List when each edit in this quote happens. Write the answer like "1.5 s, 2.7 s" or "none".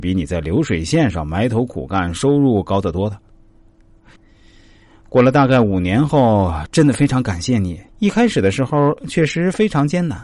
4.2 s, 6.7 s, 7.9 s